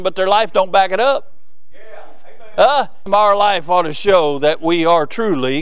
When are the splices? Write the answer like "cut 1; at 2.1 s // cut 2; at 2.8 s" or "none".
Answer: cut 1; at 3.1 s